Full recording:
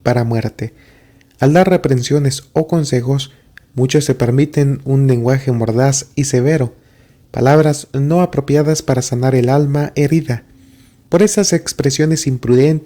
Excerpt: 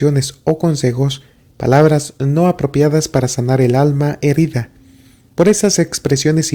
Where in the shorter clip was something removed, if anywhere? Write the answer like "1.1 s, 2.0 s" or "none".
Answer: 1.4 s